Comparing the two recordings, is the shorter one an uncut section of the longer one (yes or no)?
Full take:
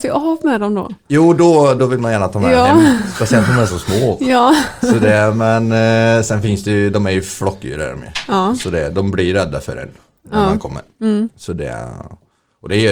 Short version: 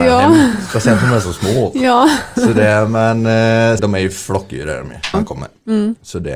no